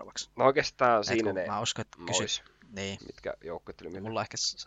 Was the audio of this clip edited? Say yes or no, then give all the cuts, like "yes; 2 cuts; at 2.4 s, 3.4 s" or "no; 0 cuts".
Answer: no; 0 cuts